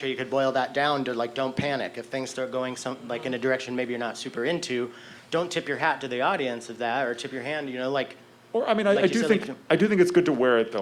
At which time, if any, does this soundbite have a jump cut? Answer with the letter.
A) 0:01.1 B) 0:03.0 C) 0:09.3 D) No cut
D